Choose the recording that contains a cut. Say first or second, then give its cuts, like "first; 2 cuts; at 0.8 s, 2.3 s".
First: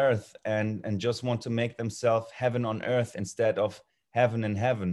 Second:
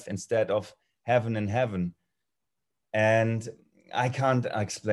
second; 1 cut; at 2.8 s